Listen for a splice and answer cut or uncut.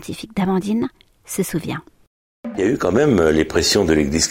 uncut